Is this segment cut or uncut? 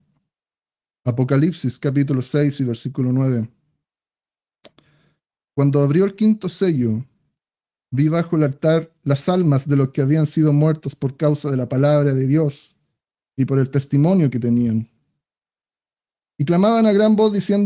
uncut